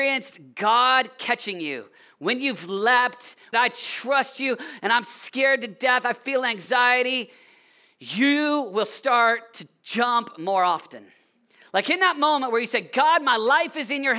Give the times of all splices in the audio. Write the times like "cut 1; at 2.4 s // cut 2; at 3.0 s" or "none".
cut 1; at 3.5 s

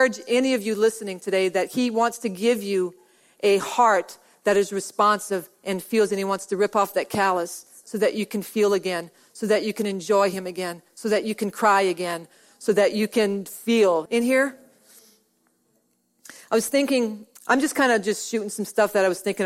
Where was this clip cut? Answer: cut 1; at 14.1 s // cut 2; at 17.4 s

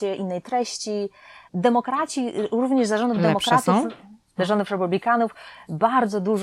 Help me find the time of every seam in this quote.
cut 1; at 4.4 s

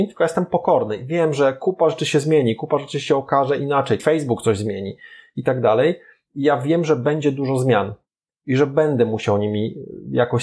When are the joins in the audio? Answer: cut 1; at 4.0 s

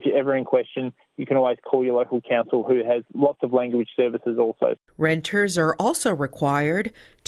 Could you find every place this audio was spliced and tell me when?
none

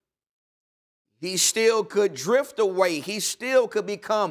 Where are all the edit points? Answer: cut 1; at 1.1 s

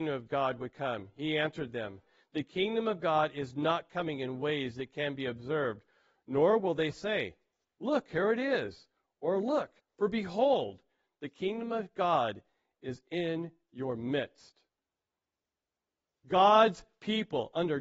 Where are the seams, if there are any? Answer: cut 1; at 9.8 s // cut 2; at 16.1 s

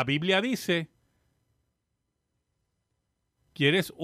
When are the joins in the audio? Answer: none

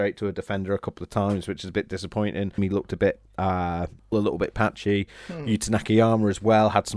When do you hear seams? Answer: cut 1; at 2.6 s // cut 2; at 4.1 s

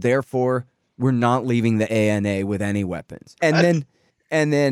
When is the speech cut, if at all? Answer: cut 1; at 3.4 s

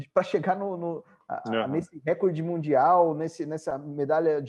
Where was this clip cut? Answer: none

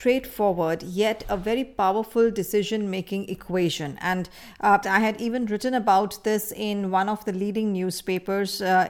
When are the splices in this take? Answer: cut 1; at 4.8 s

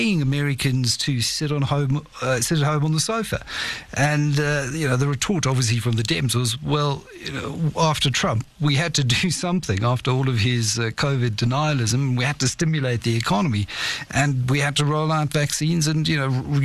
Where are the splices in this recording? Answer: none

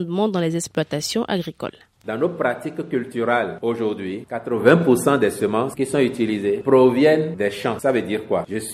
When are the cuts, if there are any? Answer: none

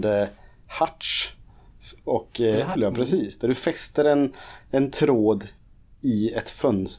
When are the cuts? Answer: cut 1; at 2.8 s

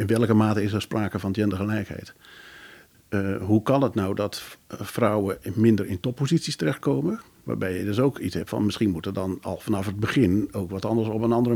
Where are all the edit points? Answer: cut 1; at 2.9 s

